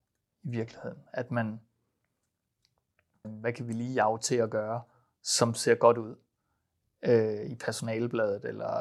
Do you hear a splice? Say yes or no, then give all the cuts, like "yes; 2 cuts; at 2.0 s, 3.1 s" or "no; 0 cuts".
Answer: yes; 1 cut; at 3.2 s